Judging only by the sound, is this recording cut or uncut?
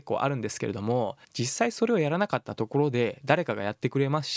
cut